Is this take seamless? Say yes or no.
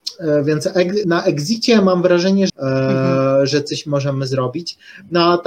no